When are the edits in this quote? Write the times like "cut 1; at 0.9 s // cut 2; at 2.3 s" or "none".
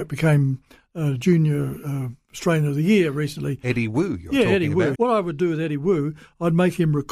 cut 1; at 4.9 s

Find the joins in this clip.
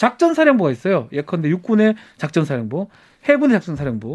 none

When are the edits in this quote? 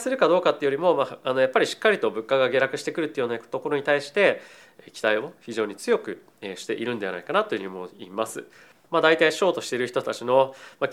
cut 1; at 8.8 s

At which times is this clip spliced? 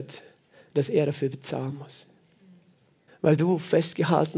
cut 1; at 3.1 s

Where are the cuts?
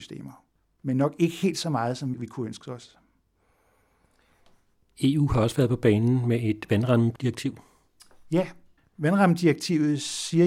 none

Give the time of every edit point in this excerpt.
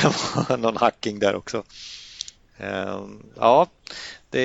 none

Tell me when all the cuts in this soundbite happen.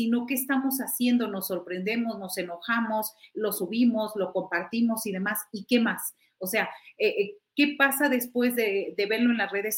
none

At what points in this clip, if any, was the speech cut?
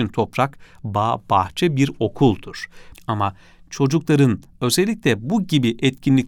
cut 1; at 2.9 s

